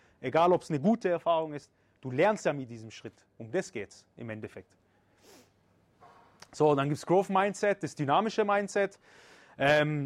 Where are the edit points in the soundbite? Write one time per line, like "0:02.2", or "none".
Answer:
0:03.3

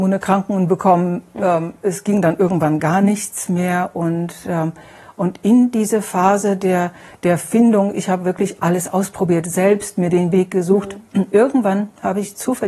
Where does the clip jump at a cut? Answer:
none

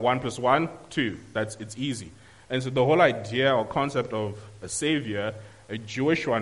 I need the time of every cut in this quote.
none

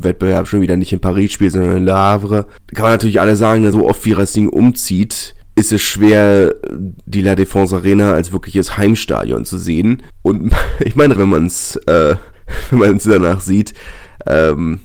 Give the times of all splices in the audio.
0:03.7
0:11.2

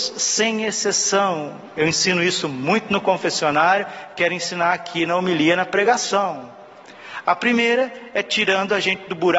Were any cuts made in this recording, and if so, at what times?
0:07.2

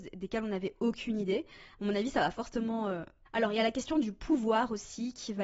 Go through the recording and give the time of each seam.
0:03.3

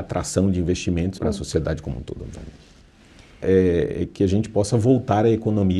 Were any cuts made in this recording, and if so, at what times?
0:01.2
0:03.4

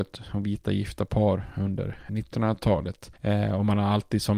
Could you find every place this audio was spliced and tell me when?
0:02.1

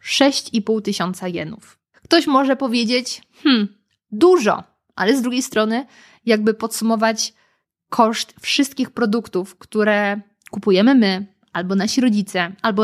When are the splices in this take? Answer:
none

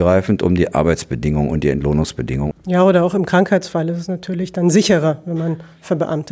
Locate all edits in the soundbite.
0:02.5

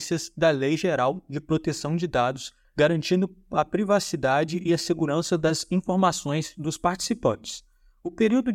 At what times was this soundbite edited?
0:02.6

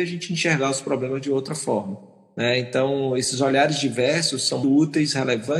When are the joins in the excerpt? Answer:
0:04.6

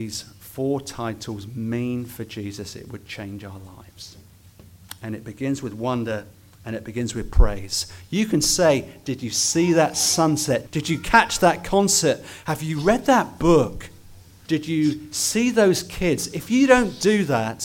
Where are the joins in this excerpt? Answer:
0:10.7
0:14.5

